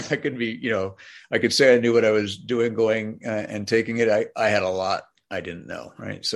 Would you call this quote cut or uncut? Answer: uncut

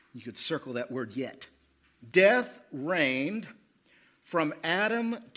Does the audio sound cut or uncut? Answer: cut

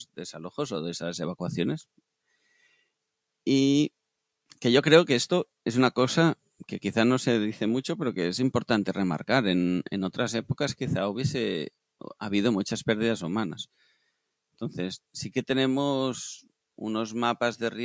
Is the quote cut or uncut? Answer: uncut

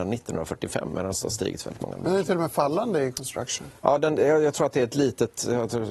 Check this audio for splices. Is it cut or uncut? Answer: uncut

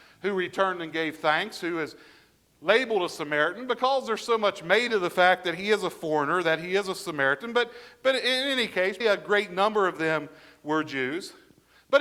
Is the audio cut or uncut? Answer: cut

